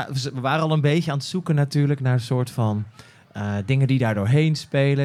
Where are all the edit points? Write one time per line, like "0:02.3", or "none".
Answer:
none

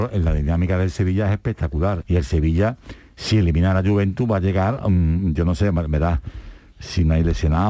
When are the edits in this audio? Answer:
0:02.0

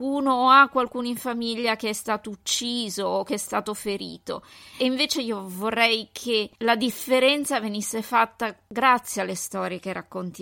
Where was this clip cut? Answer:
0:04.7

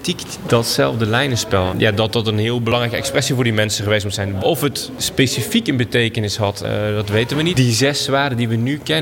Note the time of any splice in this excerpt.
0:01.7
0:07.5

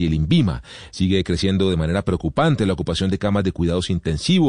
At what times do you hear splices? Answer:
0:00.9

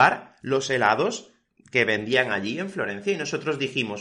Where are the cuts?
none

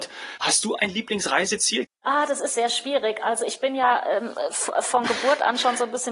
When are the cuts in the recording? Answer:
0:01.8

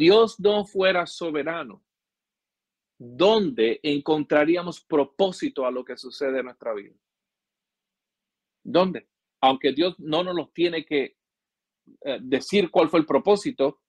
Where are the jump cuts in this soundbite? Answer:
0:09.3

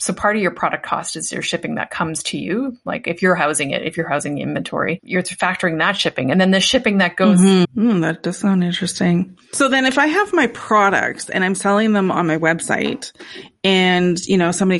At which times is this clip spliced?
0:07.6

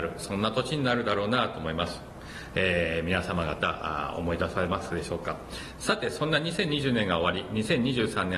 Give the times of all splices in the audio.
0:02.5

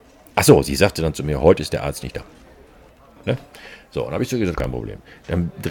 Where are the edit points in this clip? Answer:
0:03.2
0:04.6

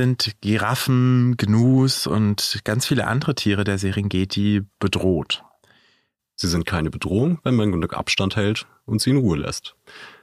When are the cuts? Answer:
0:06.2

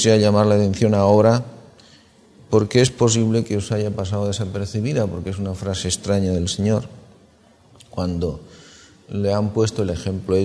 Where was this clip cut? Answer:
none

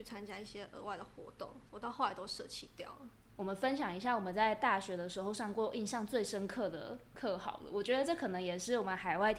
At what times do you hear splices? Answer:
0:01.7
0:03.3

